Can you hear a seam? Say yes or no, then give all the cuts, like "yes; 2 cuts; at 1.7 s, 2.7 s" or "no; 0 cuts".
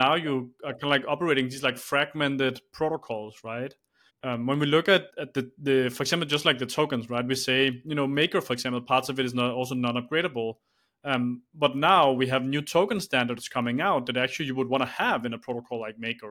yes; 2 cuts; at 4.1 s, 5.1 s